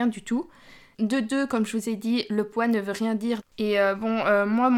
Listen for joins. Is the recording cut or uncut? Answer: cut